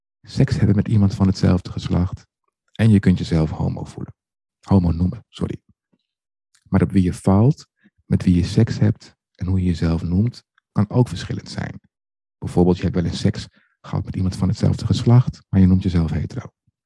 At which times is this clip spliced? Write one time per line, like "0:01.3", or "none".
none